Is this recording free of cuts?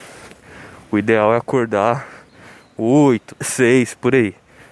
no; 1 cut; at 3.3 s

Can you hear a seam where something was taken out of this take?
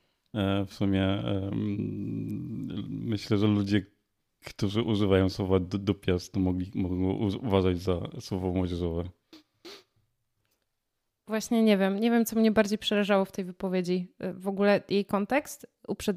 no; 0 cuts

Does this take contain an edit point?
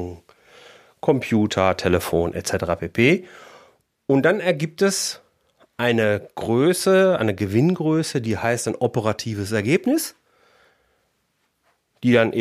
no; 0 cuts

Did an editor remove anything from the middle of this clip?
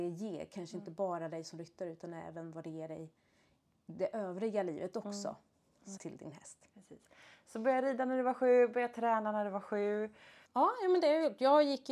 yes; 2 cuts; at 6.0 s, 10.5 s

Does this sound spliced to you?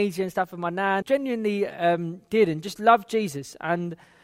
yes; 1 cut; at 1.0 s

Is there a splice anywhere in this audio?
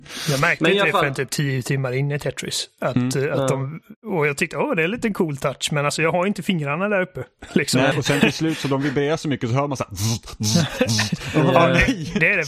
yes; 1 cut; at 7.9 s

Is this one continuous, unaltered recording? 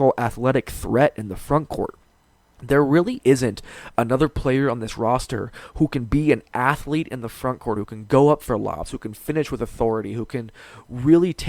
yes; 0 cuts

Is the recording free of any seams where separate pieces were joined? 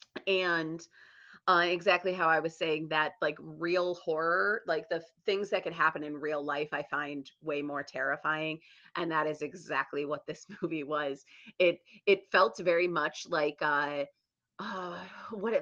yes; 0 cuts

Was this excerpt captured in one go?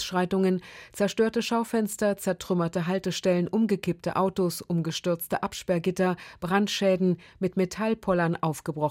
yes; 0 cuts

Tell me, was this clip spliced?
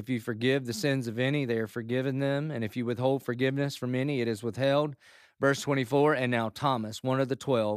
no; 0 cuts

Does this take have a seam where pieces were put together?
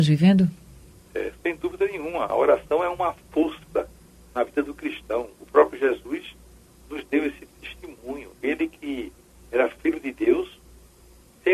no; 0 cuts

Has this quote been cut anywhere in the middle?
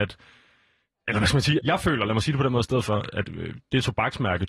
yes; 1 cut; at 1.6 s

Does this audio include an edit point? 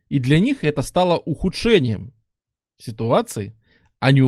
no; 0 cuts

